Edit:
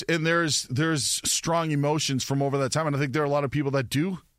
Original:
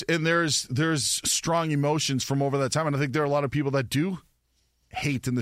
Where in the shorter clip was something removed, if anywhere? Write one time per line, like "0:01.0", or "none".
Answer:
none